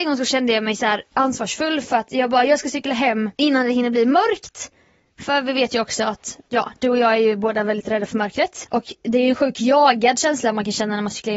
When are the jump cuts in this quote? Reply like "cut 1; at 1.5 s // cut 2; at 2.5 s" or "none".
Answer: cut 1; at 8.6 s